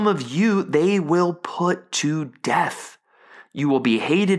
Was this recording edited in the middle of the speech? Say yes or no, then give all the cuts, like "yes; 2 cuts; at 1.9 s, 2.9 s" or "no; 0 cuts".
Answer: no; 0 cuts